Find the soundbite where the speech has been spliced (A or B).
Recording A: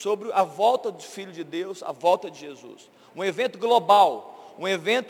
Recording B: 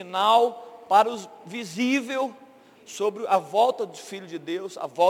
B